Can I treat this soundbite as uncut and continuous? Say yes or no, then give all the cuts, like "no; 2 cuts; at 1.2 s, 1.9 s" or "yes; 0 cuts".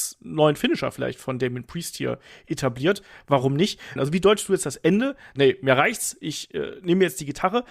no; 2 cuts; at 4.0 s, 5.4 s